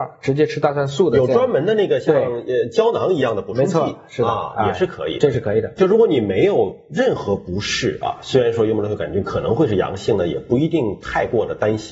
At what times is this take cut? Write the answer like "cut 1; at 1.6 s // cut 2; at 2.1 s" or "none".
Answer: cut 1; at 5.8 s